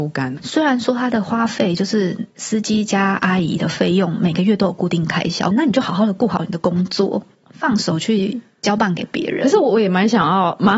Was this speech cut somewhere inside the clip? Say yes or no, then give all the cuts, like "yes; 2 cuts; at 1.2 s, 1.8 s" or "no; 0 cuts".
yes; 1 cut; at 5.5 s